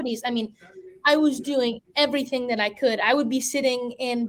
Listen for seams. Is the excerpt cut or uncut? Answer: uncut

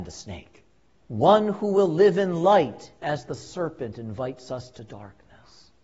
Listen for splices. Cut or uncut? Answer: cut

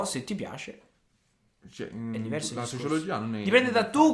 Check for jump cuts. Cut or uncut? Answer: uncut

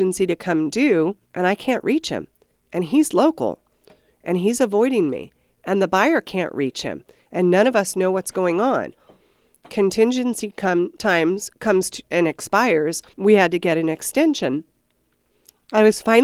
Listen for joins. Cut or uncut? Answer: cut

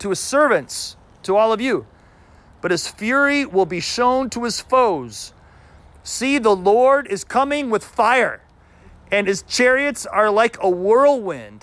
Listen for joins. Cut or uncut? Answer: uncut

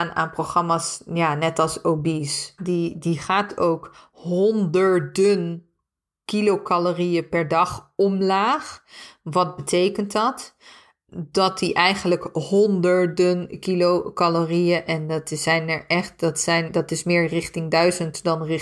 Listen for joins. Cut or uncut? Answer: cut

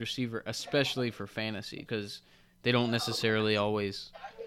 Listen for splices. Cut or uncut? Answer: cut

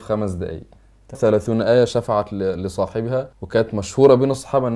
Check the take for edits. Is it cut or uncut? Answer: cut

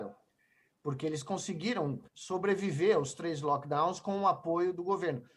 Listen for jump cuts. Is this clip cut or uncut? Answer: cut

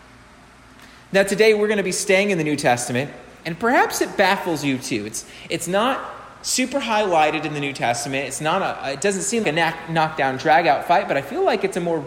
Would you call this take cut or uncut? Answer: cut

